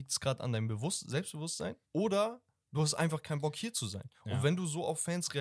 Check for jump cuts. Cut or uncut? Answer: cut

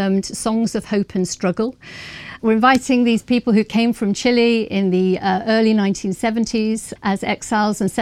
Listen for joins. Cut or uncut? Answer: cut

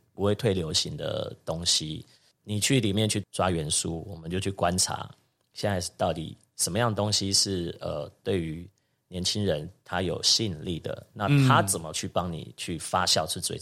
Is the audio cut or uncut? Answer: uncut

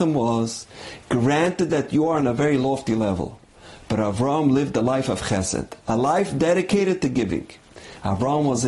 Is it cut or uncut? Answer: uncut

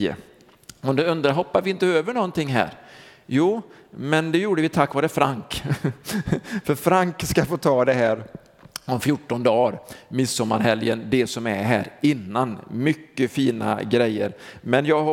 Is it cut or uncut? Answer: uncut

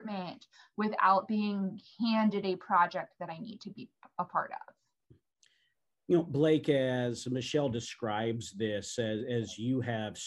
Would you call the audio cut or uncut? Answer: uncut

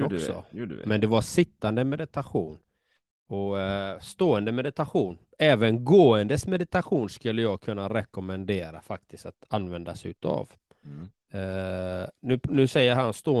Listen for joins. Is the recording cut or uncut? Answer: uncut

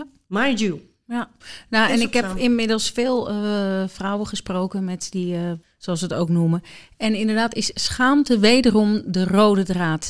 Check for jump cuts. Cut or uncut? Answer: cut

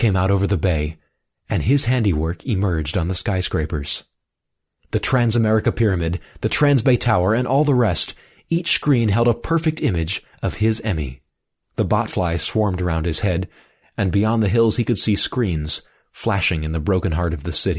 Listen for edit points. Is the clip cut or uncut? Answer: cut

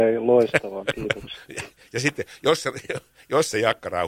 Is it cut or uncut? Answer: uncut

